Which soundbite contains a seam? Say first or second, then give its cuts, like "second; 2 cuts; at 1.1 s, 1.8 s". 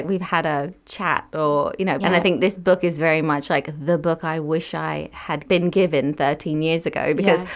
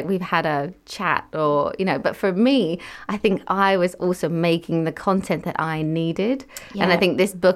first; 1 cut; at 2.0 s